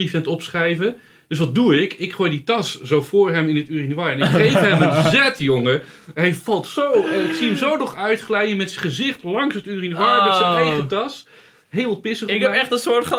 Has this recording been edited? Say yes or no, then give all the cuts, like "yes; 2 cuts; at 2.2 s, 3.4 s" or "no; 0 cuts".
no; 0 cuts